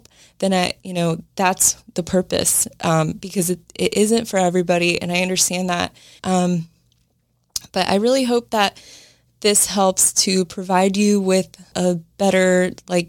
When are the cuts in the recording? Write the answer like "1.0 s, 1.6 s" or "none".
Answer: 6.2 s, 11.7 s